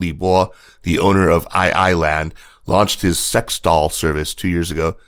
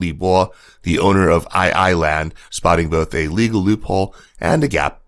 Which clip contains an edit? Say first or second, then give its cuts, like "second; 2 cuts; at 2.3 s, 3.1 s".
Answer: second; 1 cut; at 2.5 s